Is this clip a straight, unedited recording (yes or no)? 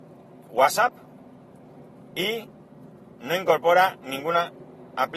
yes